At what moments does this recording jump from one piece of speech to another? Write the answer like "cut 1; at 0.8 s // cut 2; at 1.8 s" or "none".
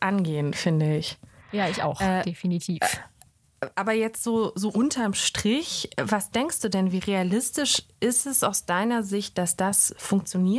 none